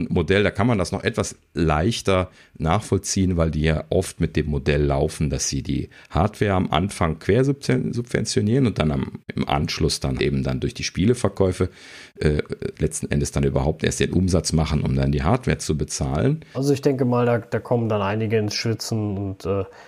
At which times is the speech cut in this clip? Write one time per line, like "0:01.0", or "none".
0:10.2
0:12.7
0:16.5